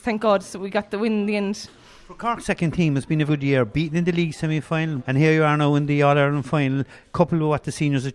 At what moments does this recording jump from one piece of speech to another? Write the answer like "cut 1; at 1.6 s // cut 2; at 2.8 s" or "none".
cut 1; at 3.3 s // cut 2; at 5.0 s

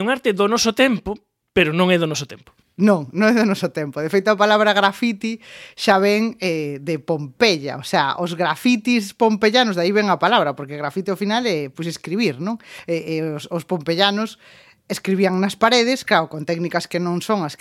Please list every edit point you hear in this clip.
none

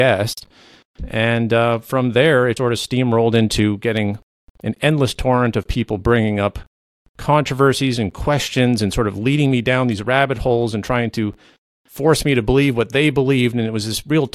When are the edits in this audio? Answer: cut 1; at 2.6 s

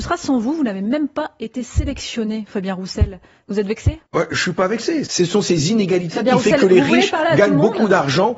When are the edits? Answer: cut 1; at 4.1 s // cut 2; at 5.1 s

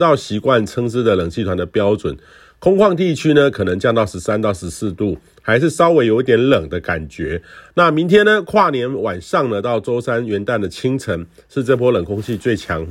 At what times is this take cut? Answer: cut 1; at 7.7 s

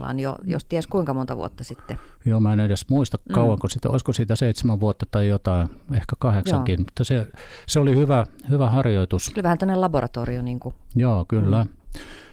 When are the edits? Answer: none

